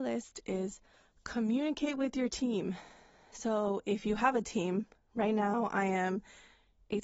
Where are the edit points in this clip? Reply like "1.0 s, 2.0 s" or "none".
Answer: none

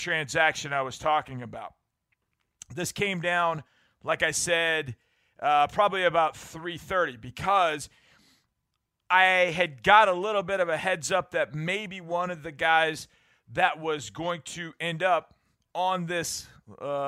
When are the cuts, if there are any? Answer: none

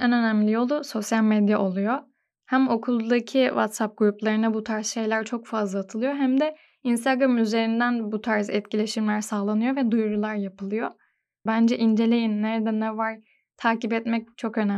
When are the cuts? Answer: 11.5 s

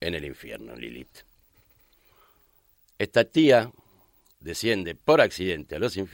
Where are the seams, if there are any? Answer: none

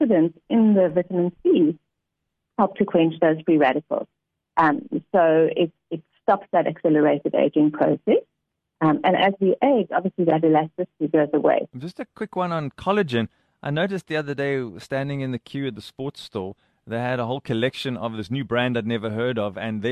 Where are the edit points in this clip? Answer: 8.8 s, 11.7 s

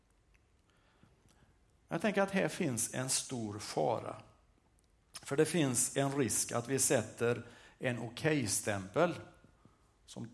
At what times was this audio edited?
none

